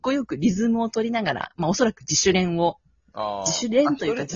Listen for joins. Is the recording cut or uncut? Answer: uncut